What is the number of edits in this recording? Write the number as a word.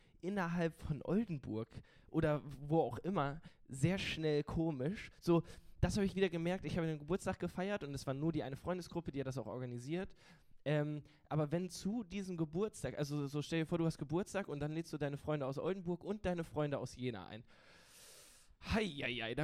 zero